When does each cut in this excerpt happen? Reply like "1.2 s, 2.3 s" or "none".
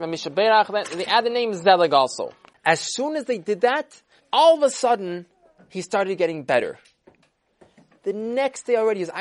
4.2 s, 8.0 s

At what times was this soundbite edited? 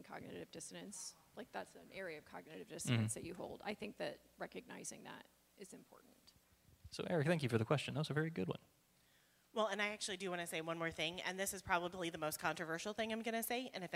none

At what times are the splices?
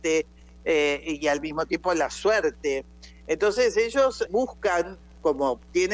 4.3 s

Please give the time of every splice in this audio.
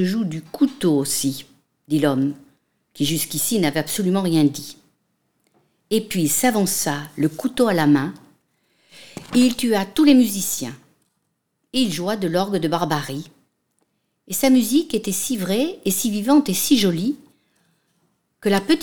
none

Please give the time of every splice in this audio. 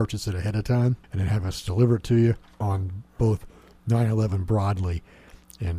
1.0 s, 2.6 s

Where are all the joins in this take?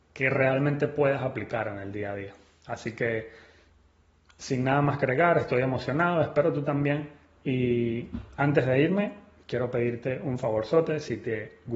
none

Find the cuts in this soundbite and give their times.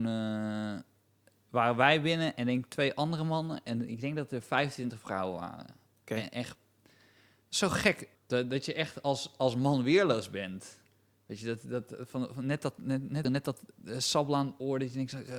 8.1 s, 13.2 s

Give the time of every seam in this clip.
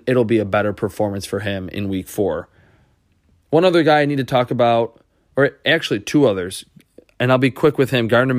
none

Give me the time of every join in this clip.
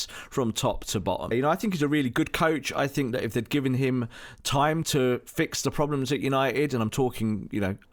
1.3 s

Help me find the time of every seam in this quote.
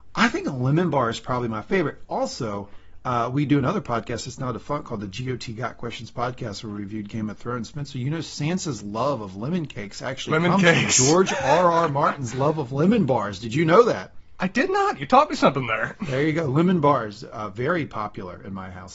none

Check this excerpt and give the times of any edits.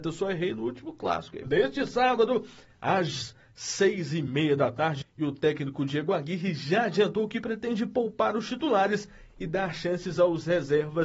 1.4 s, 5.0 s

